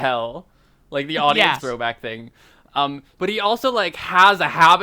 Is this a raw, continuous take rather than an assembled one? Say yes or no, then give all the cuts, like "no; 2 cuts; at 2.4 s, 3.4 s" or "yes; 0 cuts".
no; 2 cuts; at 1.6 s, 3.1 s